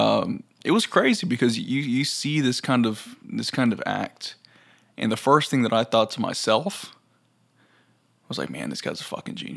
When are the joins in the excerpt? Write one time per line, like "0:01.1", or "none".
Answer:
none